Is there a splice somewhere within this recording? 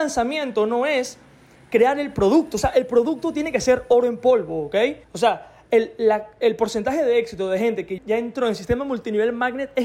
yes; 2 cuts; at 5.0 s, 8.0 s

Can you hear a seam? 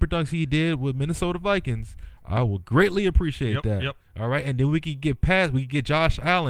no; 0 cuts

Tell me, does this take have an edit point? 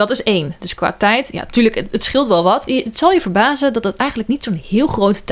yes; 1 cut; at 2.6 s

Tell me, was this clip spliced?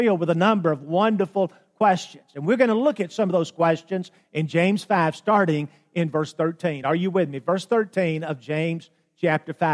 no; 0 cuts

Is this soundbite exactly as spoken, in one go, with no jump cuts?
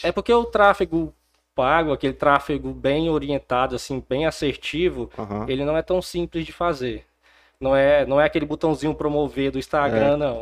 yes; 0 cuts

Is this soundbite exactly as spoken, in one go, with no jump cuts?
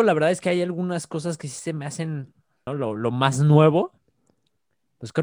no; 1 cut; at 2.7 s

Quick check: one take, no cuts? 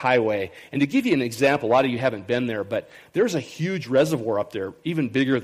yes; 0 cuts

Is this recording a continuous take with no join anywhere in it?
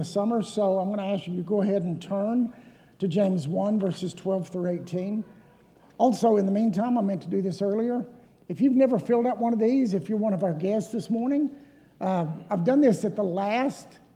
yes; 0 cuts

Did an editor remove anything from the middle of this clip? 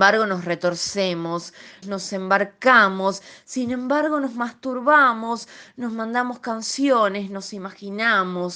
yes; 1 cut; at 1.8 s

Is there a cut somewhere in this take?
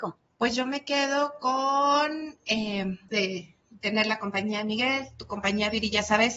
yes; 1 cut; at 3.1 s

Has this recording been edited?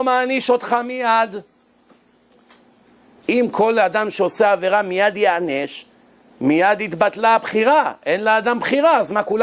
no; 0 cuts

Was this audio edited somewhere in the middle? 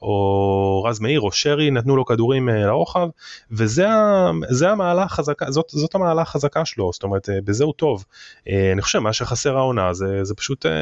no; 0 cuts

